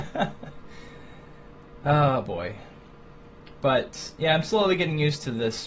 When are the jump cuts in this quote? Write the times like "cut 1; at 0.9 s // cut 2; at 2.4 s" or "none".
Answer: none